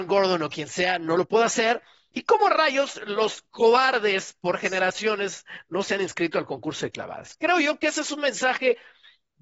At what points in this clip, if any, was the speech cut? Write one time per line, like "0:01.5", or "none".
0:02.1